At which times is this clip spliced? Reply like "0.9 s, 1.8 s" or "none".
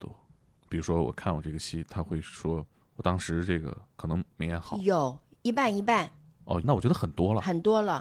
6.6 s